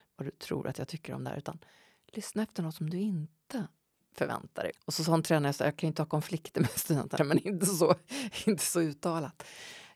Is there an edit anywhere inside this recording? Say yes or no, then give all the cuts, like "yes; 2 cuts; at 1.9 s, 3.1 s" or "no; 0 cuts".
yes; 2 cuts; at 4.7 s, 7.2 s